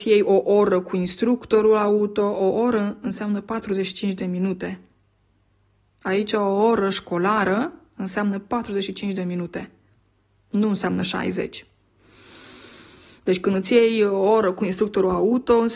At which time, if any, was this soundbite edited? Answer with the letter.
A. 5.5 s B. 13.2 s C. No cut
C